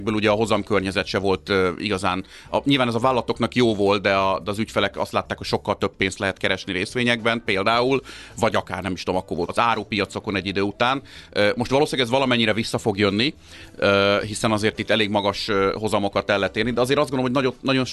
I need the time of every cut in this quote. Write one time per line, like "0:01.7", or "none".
0:09.5